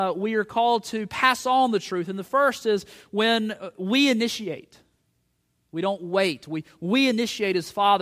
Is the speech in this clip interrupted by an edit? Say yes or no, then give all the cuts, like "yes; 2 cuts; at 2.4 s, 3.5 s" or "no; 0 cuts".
no; 0 cuts